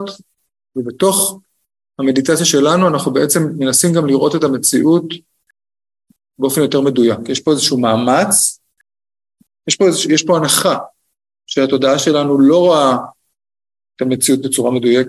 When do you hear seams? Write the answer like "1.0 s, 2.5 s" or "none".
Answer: none